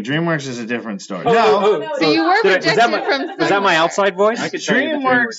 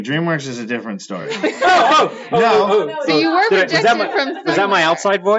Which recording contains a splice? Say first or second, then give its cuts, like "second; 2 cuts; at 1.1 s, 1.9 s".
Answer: first; 1 cut; at 1.2 s